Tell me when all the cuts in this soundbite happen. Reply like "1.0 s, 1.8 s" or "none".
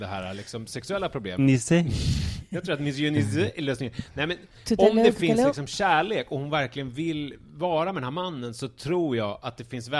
1.4 s